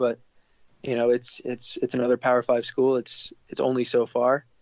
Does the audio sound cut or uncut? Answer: uncut